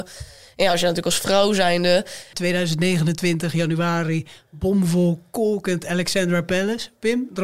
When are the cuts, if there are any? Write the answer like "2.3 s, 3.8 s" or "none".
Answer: 2.3 s